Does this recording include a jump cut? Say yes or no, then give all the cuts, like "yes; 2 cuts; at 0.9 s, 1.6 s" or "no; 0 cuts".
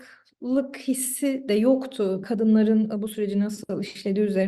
yes; 1 cut; at 2.2 s